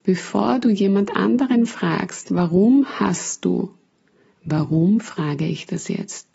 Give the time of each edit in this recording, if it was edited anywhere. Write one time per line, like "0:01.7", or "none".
0:04.3